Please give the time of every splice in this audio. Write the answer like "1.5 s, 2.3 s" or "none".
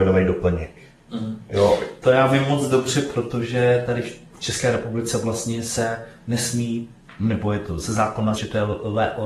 8.4 s